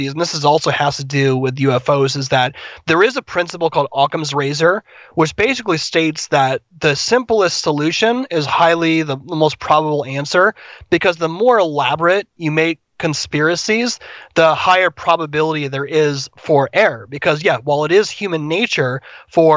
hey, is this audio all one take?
yes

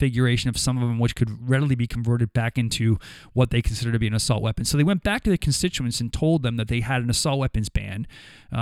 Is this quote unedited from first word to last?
yes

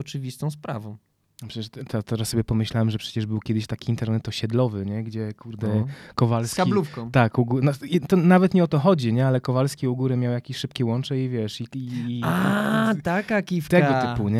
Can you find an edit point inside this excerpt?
no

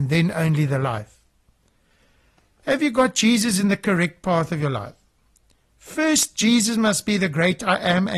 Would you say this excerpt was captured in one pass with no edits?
yes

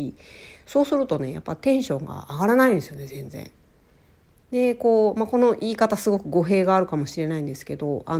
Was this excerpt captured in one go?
yes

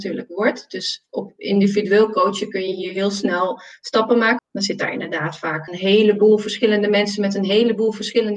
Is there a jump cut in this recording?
yes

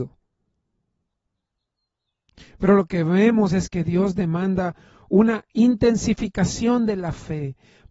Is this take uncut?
no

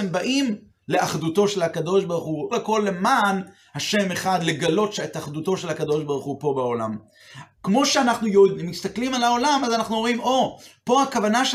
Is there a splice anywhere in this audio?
yes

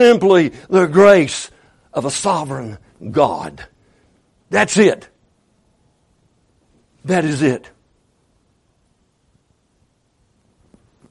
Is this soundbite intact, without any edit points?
yes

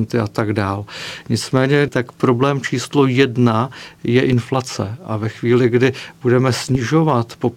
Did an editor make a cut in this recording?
yes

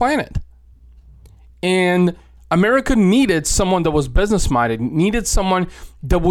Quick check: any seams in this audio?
no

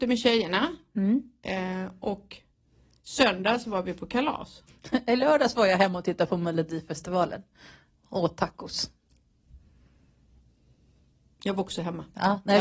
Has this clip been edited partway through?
yes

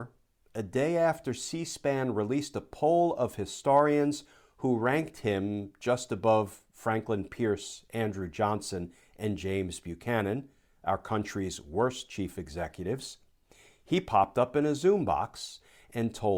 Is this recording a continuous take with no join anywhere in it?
yes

